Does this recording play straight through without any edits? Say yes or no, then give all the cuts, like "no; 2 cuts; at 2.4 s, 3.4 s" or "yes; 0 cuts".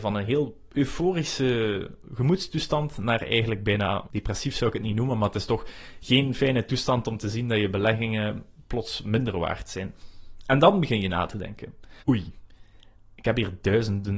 no; 2 cuts; at 4.1 s, 12.0 s